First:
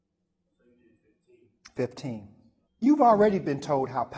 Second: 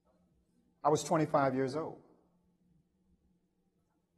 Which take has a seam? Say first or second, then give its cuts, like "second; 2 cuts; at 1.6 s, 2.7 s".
first; 1 cut; at 2.7 s